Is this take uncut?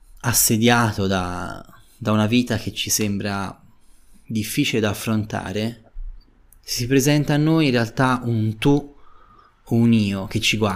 yes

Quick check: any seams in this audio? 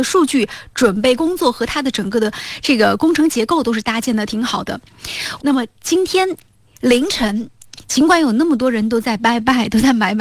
yes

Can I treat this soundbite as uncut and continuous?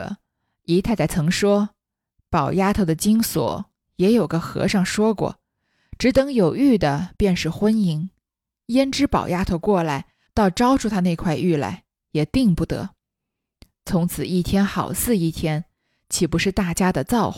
no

